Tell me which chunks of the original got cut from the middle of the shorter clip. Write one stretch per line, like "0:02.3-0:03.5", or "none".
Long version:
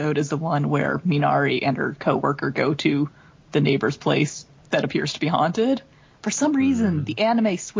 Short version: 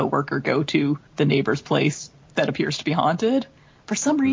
0:03.2-0:03.4